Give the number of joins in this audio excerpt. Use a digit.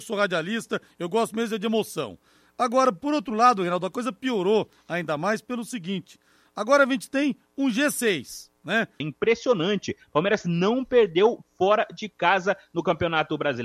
1